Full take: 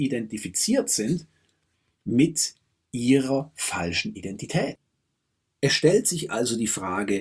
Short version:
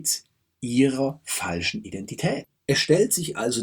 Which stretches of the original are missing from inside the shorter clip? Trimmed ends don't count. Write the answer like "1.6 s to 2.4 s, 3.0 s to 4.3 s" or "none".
4.9 s to 5.5 s